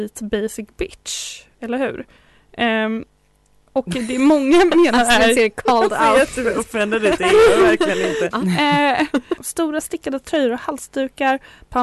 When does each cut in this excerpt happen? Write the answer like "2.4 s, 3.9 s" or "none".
8.3 s, 9.4 s